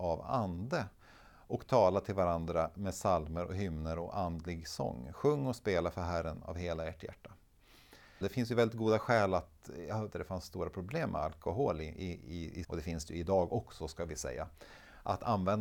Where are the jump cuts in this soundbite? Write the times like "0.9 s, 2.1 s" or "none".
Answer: 8.2 s, 10.1 s, 12.6 s